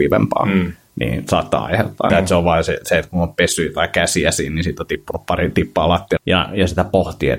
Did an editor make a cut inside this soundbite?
yes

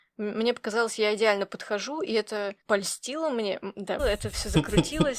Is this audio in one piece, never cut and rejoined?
no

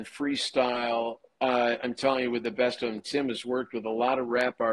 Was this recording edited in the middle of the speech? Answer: no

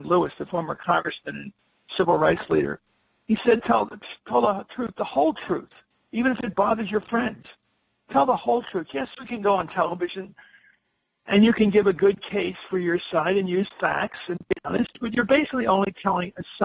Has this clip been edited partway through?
no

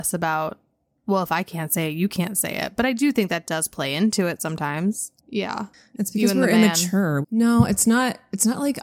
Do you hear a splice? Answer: yes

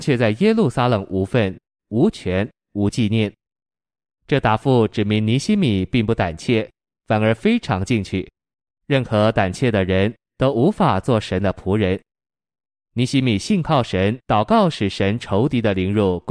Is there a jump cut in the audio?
yes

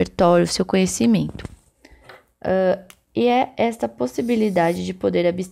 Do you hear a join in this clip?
no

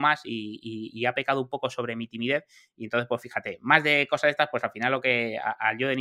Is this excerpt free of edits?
yes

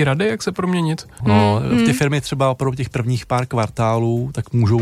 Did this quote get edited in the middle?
yes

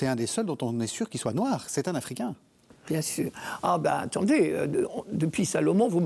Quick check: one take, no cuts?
yes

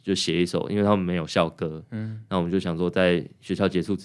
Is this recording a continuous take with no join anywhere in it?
yes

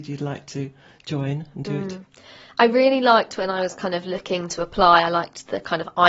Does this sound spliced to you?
no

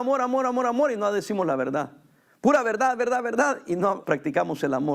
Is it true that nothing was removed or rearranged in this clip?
no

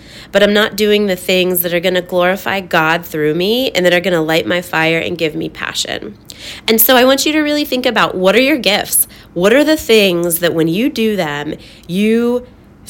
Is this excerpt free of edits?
yes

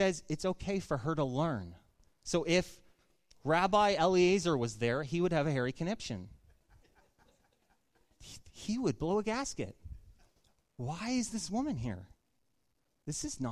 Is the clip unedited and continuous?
yes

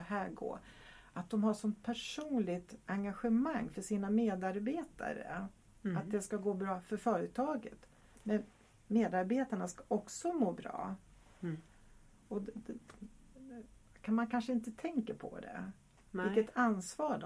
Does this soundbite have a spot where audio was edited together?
no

